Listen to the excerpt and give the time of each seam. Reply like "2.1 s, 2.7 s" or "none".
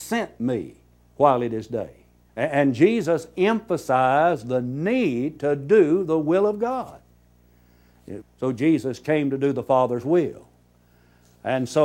2.3 s, 8.2 s